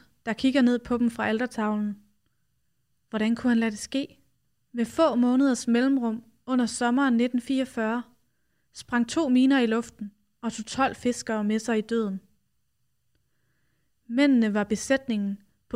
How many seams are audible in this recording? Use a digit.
0